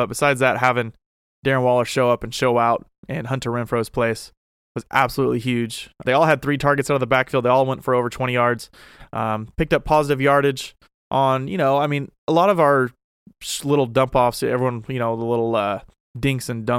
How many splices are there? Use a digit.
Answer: 1